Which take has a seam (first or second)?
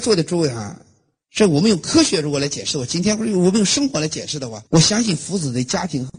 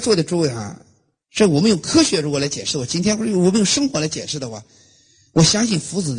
first